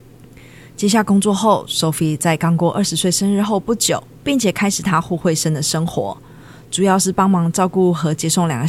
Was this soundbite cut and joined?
yes; 1 cut; at 4.2 s

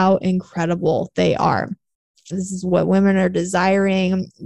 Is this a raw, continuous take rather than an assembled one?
no; 1 cut; at 2.3 s

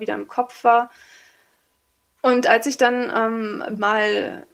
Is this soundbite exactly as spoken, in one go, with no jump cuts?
yes; 0 cuts

